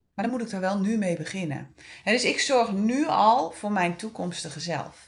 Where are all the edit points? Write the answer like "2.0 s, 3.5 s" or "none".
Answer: none